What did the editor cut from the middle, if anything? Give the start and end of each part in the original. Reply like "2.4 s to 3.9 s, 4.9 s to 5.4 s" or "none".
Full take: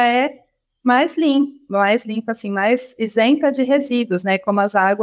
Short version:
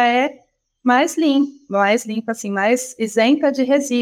none